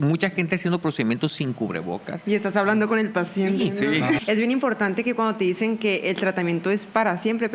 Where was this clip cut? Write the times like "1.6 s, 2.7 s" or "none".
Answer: 4.2 s